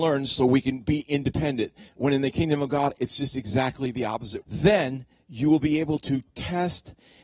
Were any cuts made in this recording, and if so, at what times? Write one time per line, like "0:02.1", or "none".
0:04.4